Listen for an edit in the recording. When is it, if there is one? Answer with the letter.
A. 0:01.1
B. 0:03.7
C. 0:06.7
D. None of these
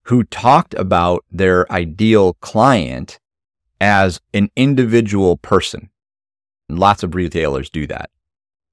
C